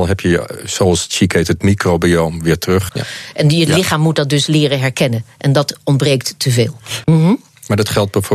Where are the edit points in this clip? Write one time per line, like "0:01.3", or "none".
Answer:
0:02.9
0:07.0